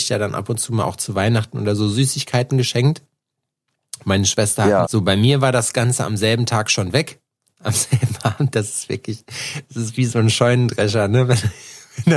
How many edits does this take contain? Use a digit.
1